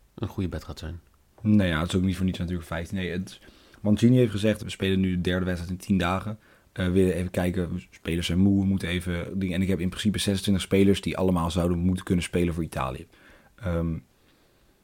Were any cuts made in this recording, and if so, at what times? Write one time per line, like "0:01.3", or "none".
0:04.6